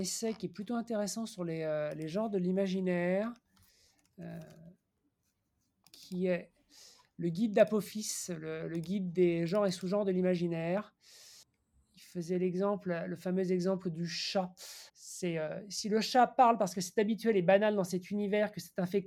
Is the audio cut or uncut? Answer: cut